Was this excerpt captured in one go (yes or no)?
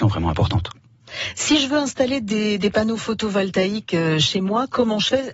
yes